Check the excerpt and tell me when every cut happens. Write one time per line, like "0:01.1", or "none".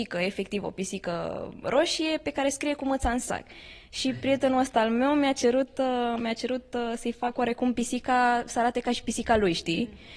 none